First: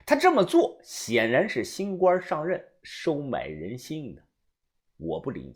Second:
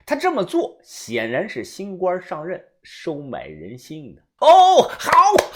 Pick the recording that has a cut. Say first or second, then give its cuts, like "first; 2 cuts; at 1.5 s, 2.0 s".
second; 1 cut; at 4.4 s